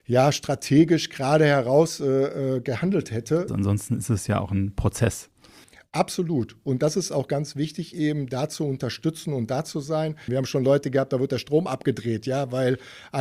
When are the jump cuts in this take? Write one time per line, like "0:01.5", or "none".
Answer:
0:03.5
0:10.3